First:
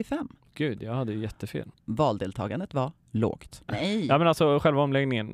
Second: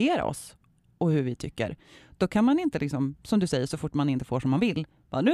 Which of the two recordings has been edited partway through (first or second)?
first